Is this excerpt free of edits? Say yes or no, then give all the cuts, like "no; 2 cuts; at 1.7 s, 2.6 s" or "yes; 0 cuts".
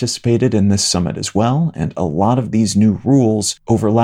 yes; 0 cuts